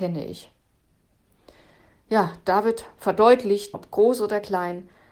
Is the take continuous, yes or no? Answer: no